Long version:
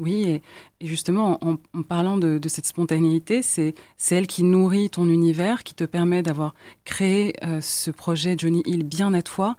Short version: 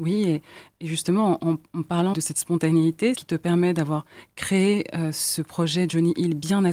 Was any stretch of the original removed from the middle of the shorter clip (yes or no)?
yes